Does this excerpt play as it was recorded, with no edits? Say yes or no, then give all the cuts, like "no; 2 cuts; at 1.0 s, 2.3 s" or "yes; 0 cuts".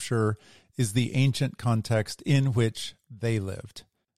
yes; 0 cuts